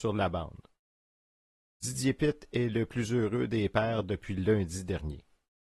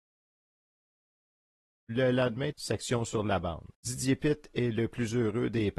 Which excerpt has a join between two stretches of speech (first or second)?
second